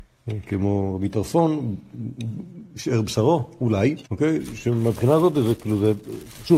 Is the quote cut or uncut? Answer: cut